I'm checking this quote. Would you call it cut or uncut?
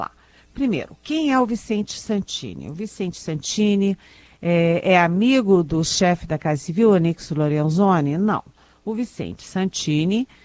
uncut